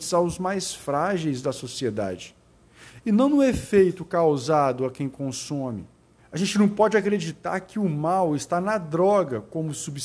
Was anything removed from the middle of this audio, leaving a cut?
yes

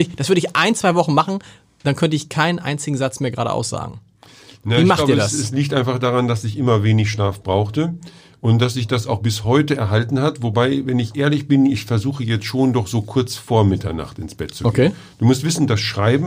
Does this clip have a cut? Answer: no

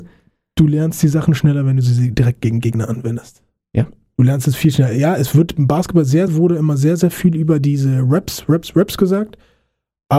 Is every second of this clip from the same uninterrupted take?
no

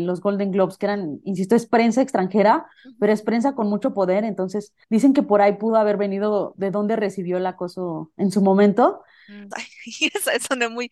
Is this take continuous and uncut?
no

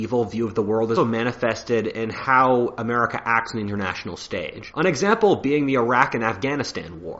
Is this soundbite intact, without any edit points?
no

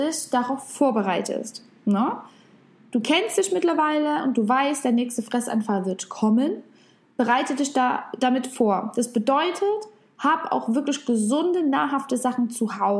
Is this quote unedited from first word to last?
yes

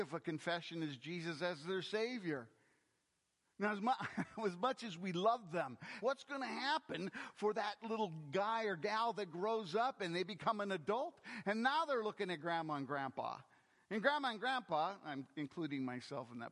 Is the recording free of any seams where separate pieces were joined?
no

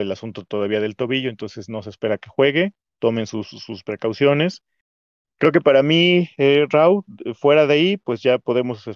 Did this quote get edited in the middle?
no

